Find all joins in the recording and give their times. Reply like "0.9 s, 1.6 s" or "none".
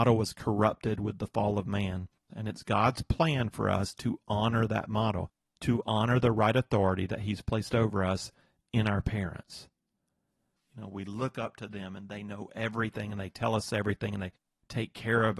2.3 s, 10.6 s